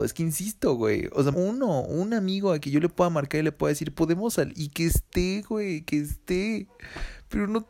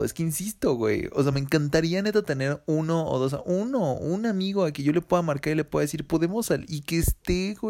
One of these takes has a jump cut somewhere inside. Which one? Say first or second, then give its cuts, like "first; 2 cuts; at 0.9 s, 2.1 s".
first; 1 cut; at 1.3 s